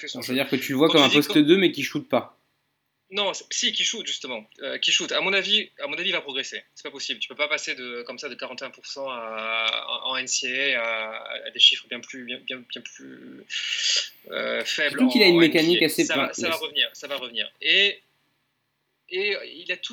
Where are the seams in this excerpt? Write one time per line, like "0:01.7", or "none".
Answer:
none